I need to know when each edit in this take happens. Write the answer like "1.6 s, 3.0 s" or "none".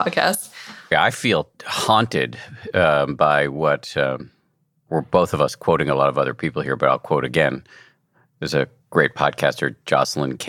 0.9 s

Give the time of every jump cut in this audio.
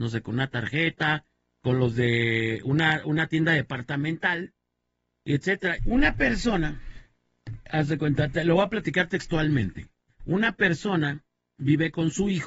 5.8 s

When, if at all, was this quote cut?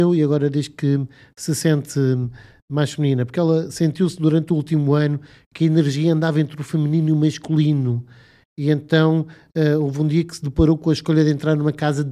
none

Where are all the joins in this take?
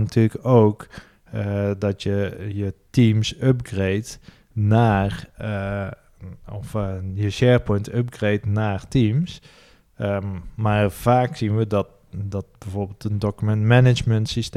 none

